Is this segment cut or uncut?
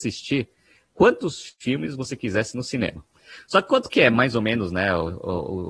uncut